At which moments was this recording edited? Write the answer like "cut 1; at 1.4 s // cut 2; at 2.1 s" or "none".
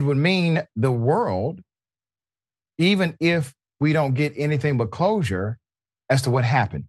none